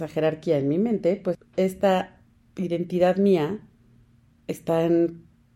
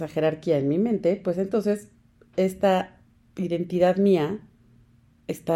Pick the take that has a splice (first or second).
first